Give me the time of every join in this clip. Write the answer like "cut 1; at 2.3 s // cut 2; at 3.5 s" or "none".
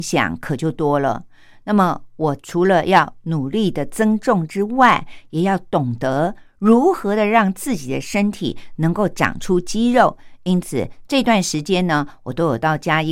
none